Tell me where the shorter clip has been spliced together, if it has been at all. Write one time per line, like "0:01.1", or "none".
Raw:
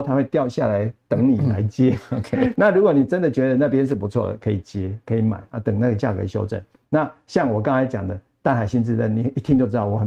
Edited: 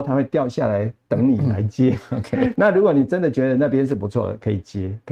none